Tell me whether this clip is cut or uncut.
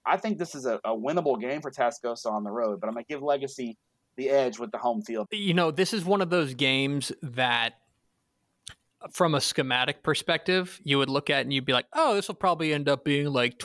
cut